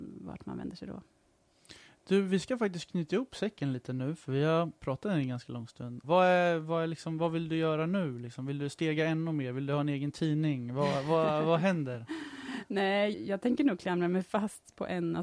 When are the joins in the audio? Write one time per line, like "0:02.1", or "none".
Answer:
0:06.0
0:13.1